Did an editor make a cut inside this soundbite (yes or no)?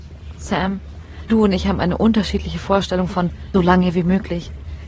yes